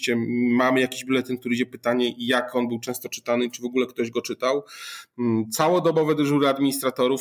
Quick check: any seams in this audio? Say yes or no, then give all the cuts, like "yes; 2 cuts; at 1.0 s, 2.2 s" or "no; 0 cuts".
no; 0 cuts